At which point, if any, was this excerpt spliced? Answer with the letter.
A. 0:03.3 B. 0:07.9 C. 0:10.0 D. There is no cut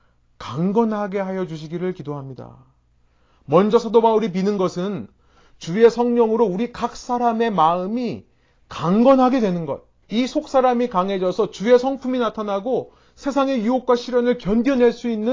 C